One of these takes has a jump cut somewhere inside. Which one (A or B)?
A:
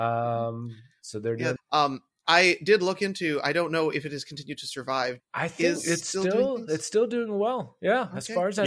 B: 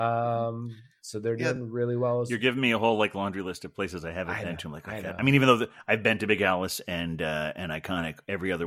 A